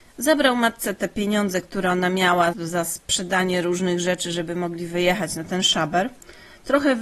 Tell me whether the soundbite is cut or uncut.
cut